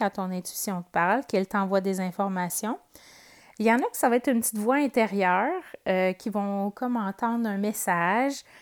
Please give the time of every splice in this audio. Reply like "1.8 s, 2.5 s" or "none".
none